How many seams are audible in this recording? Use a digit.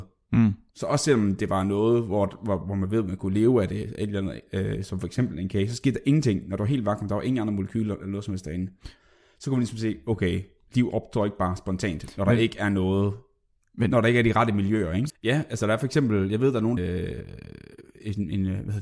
2